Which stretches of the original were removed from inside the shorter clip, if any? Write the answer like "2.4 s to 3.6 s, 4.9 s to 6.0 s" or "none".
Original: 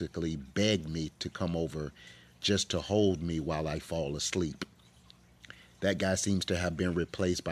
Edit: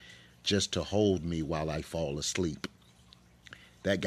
none